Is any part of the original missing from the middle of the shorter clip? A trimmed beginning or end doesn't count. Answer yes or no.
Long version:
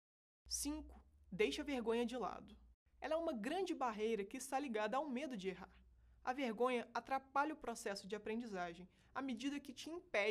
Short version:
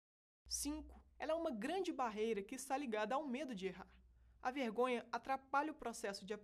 yes